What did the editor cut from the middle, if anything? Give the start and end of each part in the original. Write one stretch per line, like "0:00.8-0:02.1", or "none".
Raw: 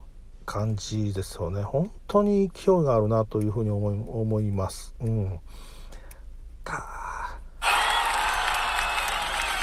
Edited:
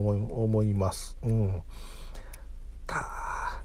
none